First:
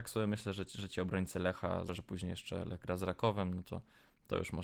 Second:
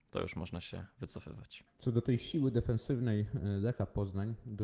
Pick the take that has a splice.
first; 1 cut; at 1.9 s

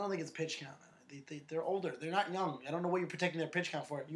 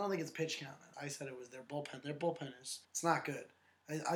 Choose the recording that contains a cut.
second; 2 cuts; at 0.9 s, 2.8 s

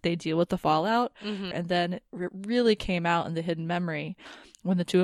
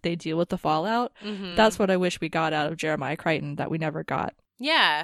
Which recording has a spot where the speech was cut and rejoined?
first; 1 cut; at 1.5 s

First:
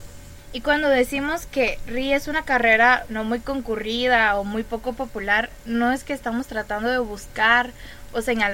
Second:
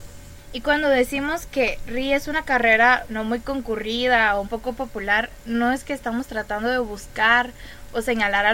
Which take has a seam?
second; 1 cut; at 4.4 s

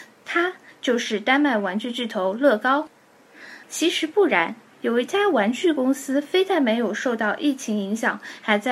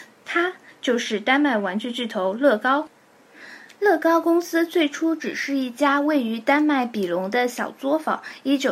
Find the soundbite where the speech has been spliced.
first; 1 cut; at 3.6 s

